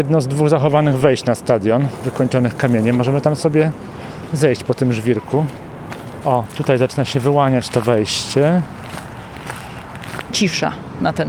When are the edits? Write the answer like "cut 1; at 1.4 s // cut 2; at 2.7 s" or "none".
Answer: cut 1; at 6.2 s // cut 2; at 10.3 s